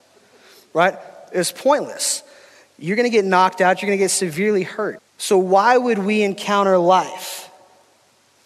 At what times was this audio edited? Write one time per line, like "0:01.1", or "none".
0:05.0

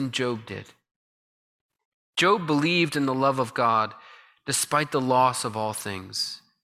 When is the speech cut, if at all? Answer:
none

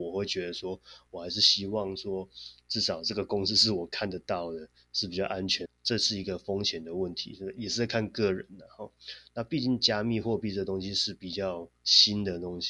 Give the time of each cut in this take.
0:05.7

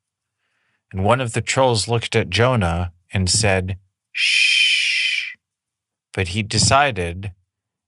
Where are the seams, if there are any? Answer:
0:05.9

